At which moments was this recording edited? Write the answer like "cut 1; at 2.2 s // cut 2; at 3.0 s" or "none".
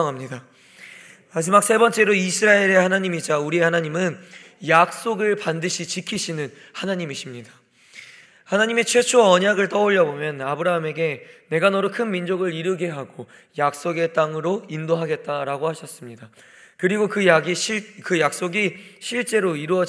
none

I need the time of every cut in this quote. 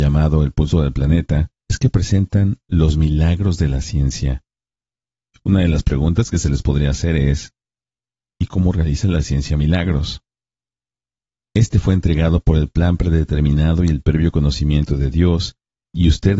cut 1; at 1.7 s // cut 2; at 11.4 s

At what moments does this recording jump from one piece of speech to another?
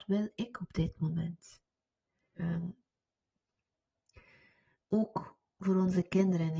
cut 1; at 2.4 s

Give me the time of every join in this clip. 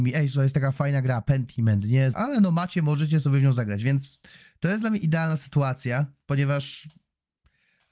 cut 1; at 2.1 s

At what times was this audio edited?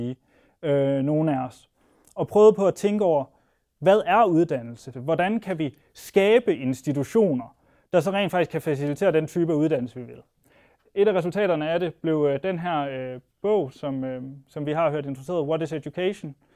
cut 1; at 4.9 s

